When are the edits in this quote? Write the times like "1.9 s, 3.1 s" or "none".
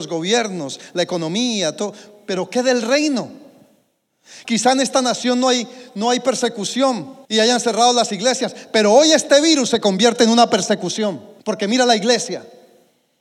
4.4 s, 7.2 s, 11.4 s

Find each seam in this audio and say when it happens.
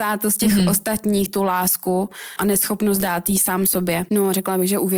4.1 s

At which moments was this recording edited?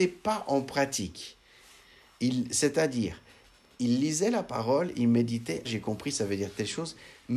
5.6 s

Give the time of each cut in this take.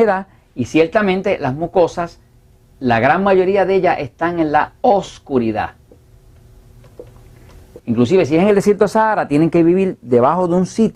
7.8 s

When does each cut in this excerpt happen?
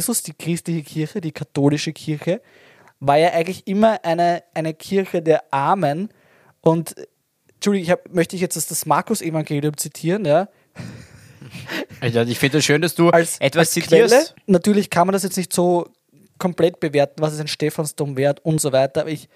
14.4 s

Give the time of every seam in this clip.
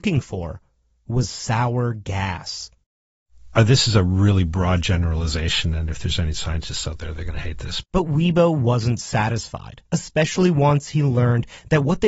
7.8 s, 9.9 s

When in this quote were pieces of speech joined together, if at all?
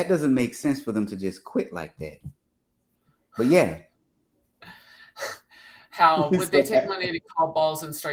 none

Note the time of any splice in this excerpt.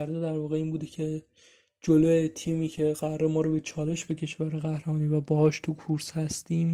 none

